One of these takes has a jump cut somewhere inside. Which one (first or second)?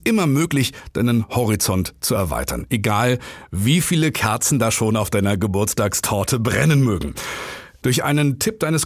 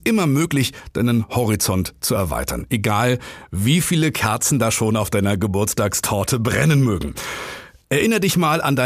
first